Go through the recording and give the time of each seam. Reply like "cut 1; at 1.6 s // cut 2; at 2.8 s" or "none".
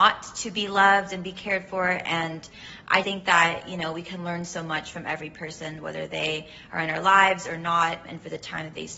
cut 1; at 3.0 s // cut 2; at 8.1 s

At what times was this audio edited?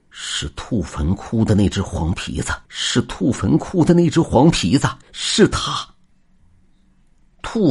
cut 1; at 2.6 s // cut 2; at 5.0 s

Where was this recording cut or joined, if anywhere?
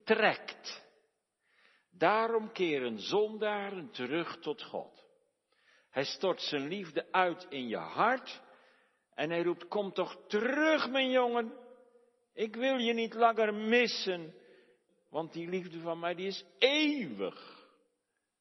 cut 1; at 14.9 s

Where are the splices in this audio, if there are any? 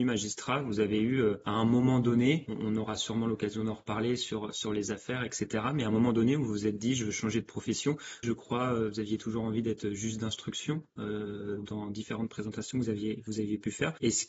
cut 1; at 8.2 s

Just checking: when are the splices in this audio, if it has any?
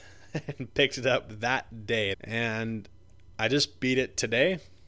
cut 1; at 2.1 s

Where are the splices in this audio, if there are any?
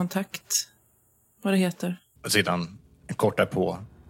cut 1; at 2.2 s

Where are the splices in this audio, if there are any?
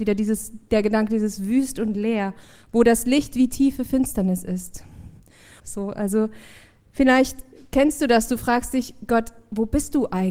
cut 1; at 5.6 s

